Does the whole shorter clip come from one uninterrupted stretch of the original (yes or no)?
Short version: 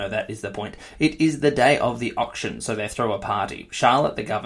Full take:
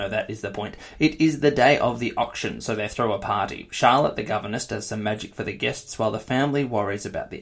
yes